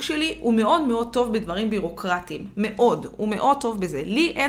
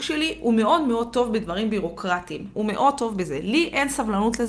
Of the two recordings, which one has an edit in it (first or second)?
second